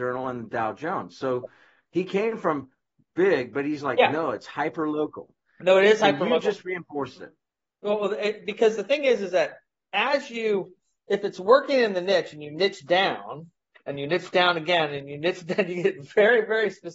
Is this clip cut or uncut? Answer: uncut